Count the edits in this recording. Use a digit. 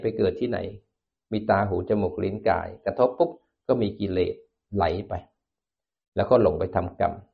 0